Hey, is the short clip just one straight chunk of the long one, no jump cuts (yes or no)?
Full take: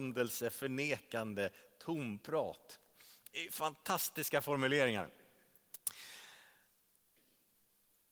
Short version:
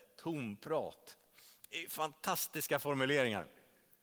yes